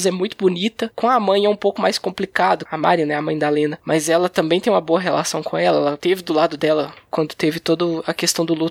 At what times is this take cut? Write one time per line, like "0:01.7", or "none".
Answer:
0:02.7

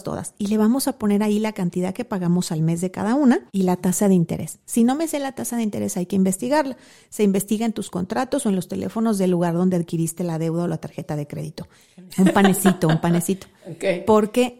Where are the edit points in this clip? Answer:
0:03.5
0:12.1

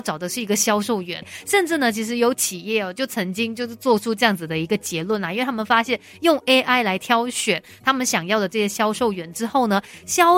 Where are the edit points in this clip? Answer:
0:01.2

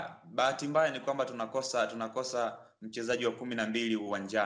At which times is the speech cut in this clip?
none

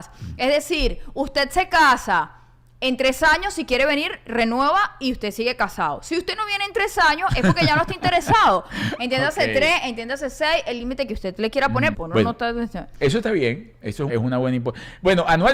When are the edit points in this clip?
0:11.9
0:14.1

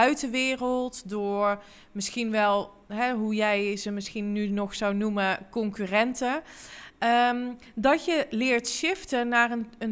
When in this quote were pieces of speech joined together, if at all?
none

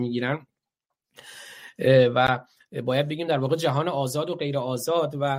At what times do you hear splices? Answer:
none

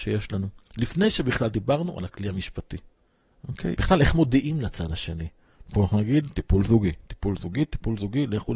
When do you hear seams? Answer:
0:03.7

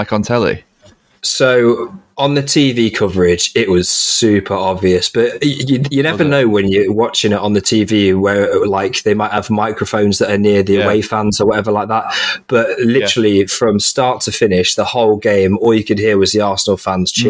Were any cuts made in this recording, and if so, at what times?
none

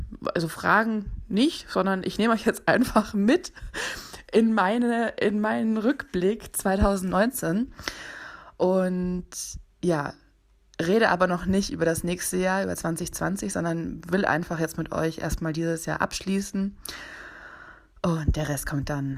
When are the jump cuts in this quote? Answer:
none

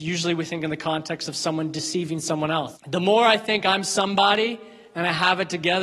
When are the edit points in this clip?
0:02.7

